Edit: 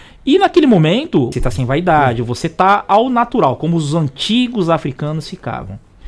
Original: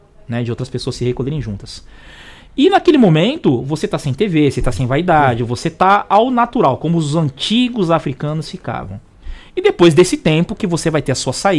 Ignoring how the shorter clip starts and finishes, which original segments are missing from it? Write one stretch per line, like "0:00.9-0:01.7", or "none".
0:03.6-0:04.5